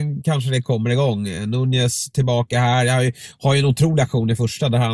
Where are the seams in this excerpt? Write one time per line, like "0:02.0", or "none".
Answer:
none